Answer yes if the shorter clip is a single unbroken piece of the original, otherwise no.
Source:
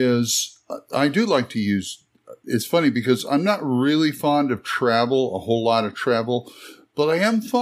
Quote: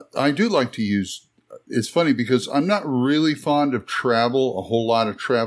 yes